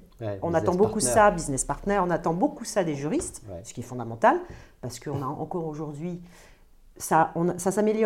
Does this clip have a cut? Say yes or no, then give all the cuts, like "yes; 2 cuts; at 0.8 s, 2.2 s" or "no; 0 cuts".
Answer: no; 0 cuts